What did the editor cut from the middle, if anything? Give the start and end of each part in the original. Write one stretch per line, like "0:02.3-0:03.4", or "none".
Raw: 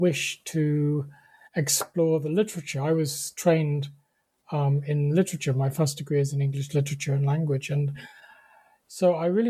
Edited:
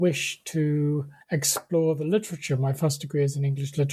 0:01.2-0:01.5
0:02.7-0:05.5

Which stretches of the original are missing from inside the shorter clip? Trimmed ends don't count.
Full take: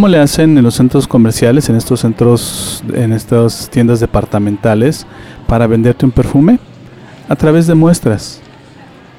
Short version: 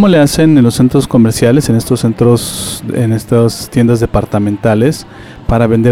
none

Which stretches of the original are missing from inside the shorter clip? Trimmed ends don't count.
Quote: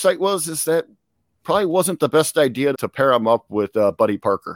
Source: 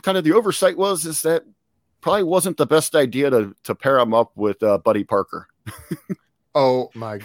0:03.3-0:03.6

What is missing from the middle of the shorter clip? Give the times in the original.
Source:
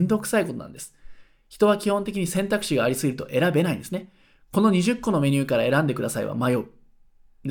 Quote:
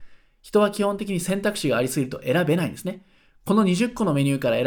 none

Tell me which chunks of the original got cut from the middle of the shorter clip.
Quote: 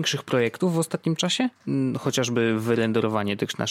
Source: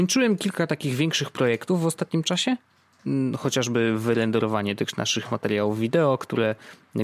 0:02.6-0:02.9

